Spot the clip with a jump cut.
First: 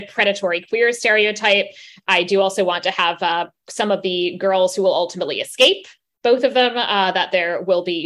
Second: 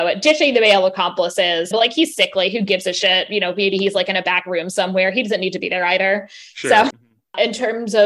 second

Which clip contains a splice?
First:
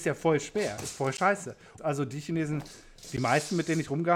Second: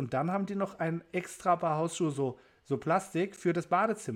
first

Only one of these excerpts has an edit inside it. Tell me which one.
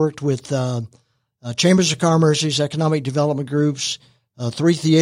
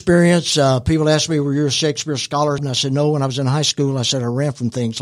second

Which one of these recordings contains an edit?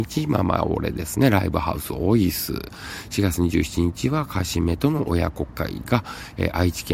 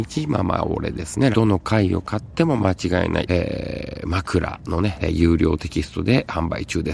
second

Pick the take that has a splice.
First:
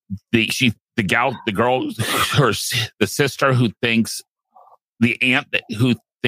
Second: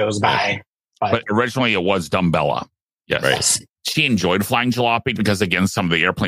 second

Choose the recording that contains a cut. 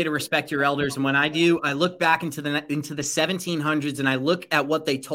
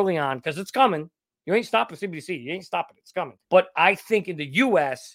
second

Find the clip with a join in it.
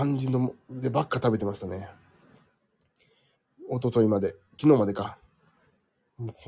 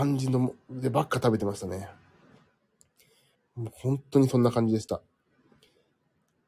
second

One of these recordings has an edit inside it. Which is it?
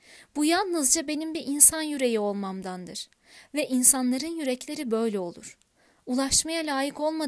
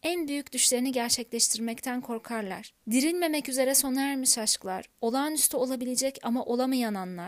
second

